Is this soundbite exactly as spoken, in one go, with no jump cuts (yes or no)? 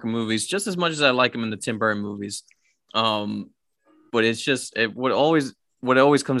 no